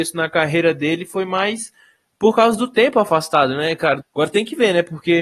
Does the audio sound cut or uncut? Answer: cut